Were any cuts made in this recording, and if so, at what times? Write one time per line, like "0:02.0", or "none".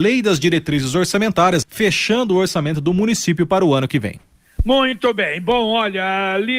0:01.6